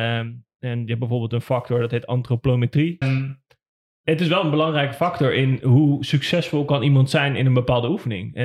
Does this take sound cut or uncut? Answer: cut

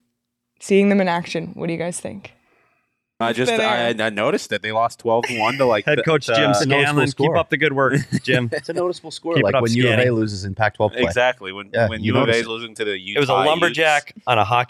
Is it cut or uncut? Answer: cut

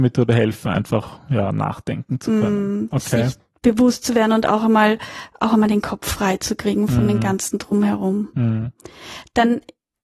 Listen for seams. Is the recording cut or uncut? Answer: uncut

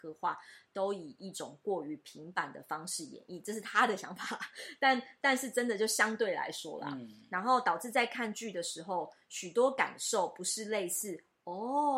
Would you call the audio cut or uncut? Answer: uncut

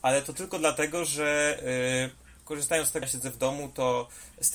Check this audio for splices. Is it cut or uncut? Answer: cut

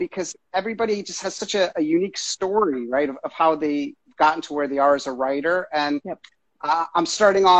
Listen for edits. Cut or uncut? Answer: uncut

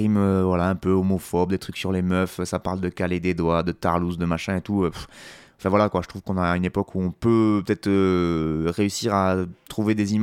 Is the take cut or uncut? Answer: uncut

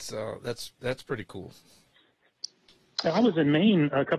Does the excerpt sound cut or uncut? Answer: uncut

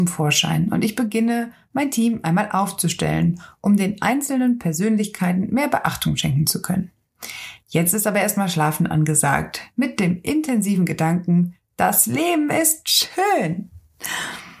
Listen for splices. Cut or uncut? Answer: uncut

